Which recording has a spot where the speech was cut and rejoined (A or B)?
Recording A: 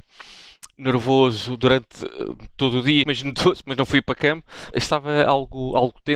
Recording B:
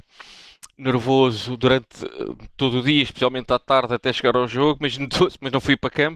A